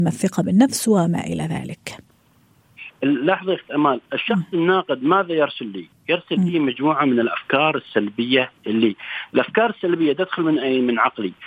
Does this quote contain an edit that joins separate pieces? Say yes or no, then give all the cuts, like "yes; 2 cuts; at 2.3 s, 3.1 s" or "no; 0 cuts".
no; 0 cuts